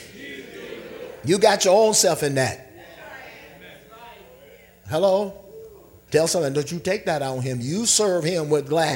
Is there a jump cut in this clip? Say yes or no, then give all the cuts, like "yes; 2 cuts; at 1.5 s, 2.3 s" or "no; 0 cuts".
yes; 1 cut; at 6.1 s